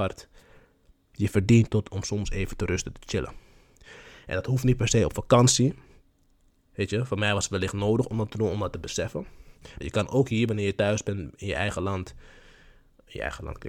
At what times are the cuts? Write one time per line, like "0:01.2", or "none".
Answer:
0:09.8